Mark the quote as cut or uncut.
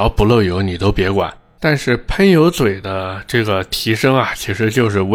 cut